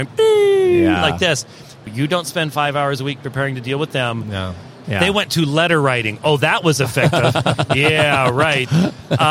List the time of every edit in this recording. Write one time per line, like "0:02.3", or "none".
0:01.9
0:04.8